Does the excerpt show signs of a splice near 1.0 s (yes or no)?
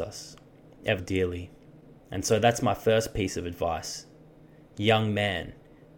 yes